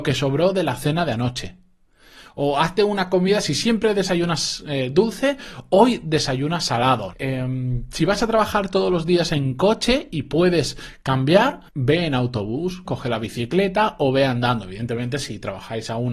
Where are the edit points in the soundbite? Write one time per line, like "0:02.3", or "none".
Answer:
0:07.1
0:11.7
0:12.8